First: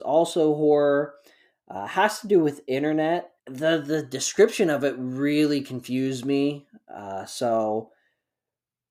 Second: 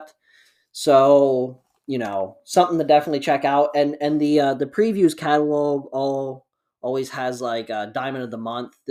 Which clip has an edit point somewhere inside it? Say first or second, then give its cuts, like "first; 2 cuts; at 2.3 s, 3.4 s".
first; 1 cut; at 3.4 s